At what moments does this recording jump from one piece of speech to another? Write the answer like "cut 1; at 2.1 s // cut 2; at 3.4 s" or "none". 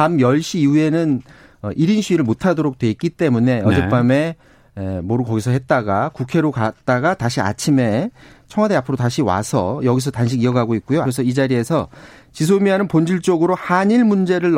cut 1; at 11.0 s